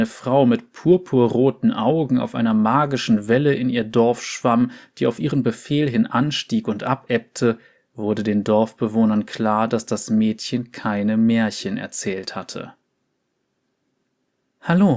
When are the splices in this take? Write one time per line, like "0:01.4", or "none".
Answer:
none